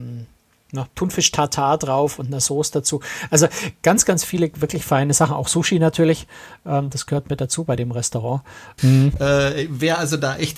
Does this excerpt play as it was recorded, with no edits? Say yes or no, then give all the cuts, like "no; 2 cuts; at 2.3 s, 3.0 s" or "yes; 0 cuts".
no; 1 cut; at 8.8 s